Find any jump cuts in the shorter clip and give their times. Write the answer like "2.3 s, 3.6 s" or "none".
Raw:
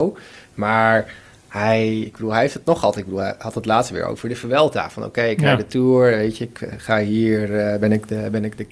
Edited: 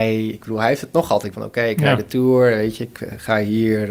1.3 s

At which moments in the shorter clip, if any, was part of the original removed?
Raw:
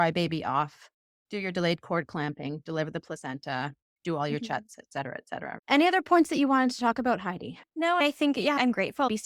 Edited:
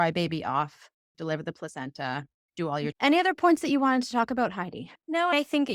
1.1 s, 2.9 s

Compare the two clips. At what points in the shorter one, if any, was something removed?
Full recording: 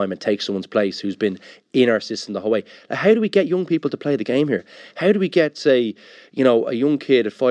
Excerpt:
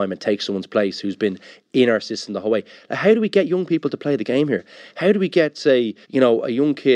6.0 s

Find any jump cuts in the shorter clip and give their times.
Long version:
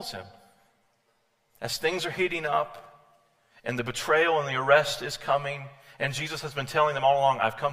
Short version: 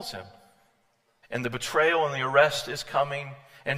1.2 s

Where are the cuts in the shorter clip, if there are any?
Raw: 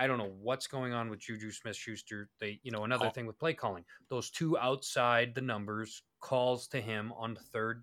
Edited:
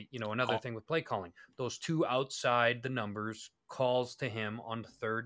none

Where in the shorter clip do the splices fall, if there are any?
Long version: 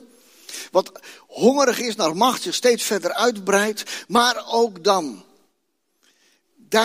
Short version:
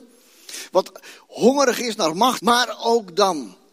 2.4 s

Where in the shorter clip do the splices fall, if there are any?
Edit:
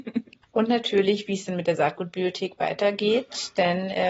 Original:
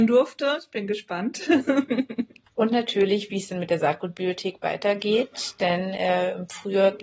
none

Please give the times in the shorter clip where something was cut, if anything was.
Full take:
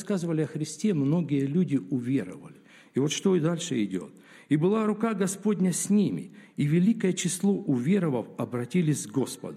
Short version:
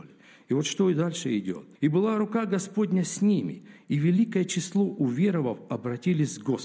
1.8 s

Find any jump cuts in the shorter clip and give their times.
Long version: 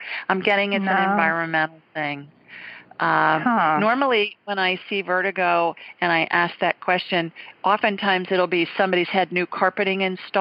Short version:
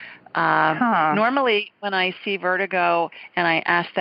none

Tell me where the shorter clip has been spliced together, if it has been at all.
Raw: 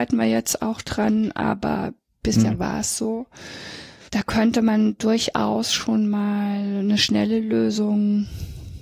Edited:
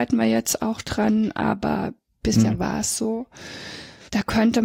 none

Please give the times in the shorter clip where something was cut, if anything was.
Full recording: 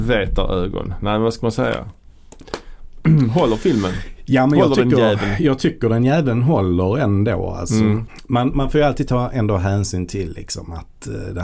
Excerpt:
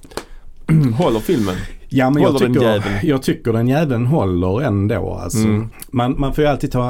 none

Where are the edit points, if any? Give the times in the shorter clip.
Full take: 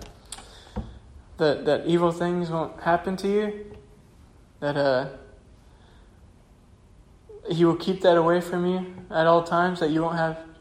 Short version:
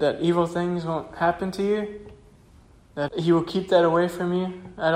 3.1 s

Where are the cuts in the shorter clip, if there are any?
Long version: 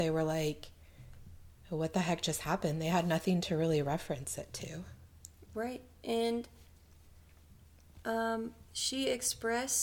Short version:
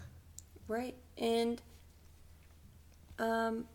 none

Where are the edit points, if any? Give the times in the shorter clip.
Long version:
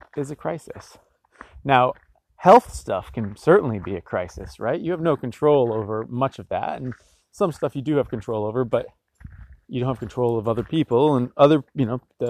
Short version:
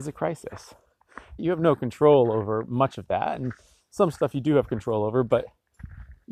1.4 s

